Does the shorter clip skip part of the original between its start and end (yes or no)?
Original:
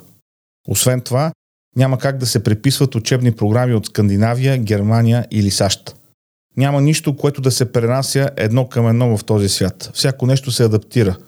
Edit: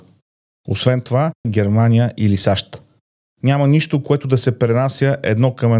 yes